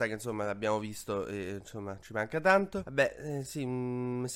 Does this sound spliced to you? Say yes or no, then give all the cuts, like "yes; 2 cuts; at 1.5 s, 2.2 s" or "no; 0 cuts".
yes; 1 cut; at 2.8 s